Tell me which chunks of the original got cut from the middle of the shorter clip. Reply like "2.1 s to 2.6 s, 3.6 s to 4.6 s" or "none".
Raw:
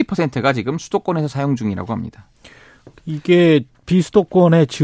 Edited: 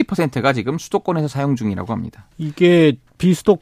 2.3 s to 3.0 s